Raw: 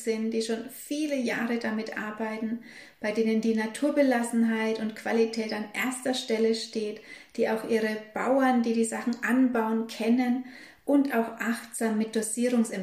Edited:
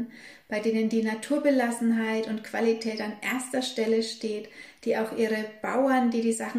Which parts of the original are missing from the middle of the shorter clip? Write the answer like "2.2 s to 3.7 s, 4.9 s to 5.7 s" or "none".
none